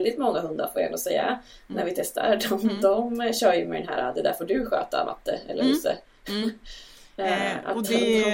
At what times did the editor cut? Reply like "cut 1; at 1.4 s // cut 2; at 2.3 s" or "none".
none